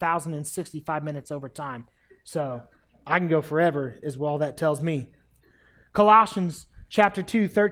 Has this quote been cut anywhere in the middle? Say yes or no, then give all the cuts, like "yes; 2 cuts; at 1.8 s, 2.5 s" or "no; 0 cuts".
no; 0 cuts